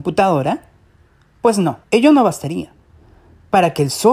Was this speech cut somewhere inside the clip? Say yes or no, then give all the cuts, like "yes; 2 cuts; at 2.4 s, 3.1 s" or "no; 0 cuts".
yes; 1 cut; at 1.8 s